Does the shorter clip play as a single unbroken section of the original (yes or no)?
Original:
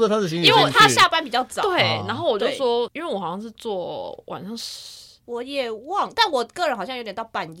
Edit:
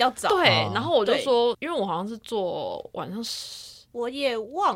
yes